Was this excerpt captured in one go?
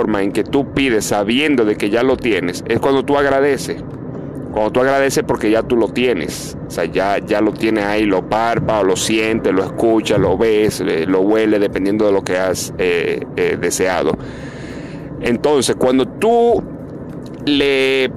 yes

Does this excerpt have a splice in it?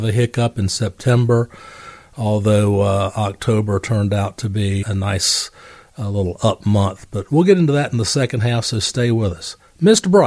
yes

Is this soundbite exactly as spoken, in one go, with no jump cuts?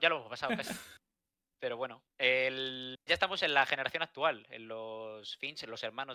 no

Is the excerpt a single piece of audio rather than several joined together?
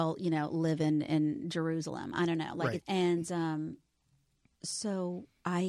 no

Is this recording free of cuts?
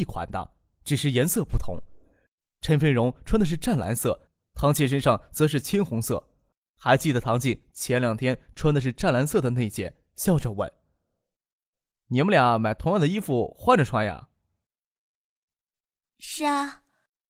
yes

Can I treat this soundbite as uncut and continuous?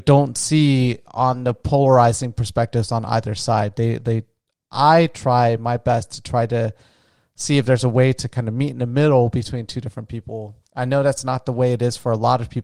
yes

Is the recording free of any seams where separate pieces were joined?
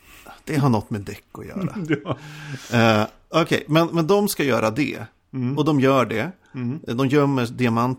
yes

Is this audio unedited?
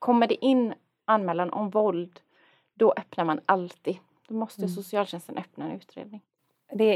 yes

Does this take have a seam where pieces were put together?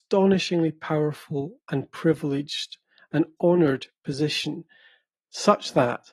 no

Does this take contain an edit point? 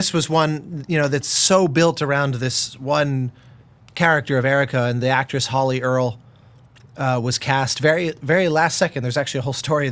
no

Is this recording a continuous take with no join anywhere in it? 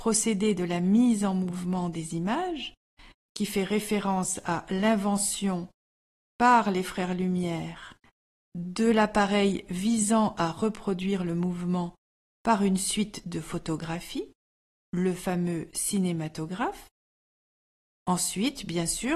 no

